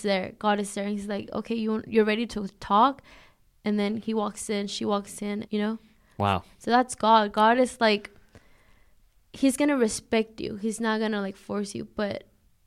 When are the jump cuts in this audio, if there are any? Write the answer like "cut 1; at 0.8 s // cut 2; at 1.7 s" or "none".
cut 1; at 5.5 s